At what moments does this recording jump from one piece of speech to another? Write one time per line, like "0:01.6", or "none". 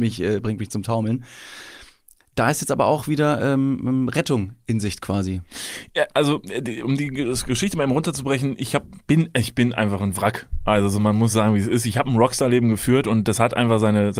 none